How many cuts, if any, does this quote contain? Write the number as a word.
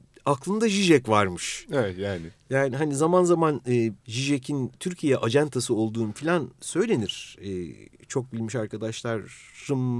one